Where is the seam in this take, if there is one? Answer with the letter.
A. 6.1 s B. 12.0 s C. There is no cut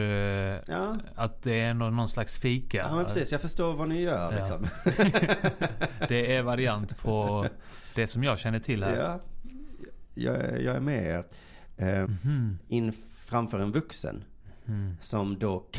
B